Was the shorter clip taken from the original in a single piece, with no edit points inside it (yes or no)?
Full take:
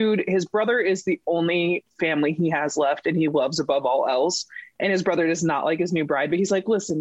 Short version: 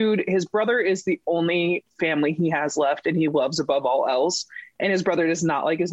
yes